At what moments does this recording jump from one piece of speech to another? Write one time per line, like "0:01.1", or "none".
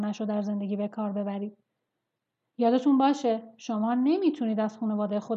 none